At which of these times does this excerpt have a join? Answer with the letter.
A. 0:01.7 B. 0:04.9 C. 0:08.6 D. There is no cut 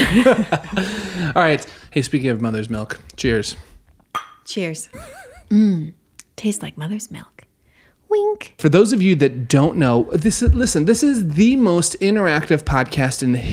B